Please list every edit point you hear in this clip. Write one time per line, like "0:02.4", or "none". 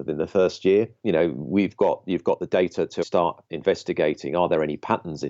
0:01.0
0:03.0